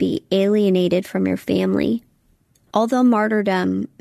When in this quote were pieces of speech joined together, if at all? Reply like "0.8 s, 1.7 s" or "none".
2.7 s